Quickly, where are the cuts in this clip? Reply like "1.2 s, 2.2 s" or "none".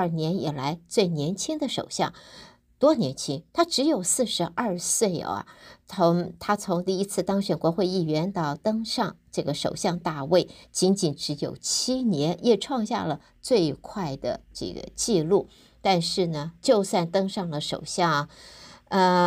none